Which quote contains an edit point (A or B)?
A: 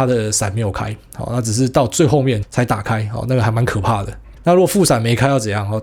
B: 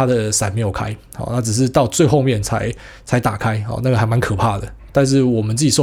A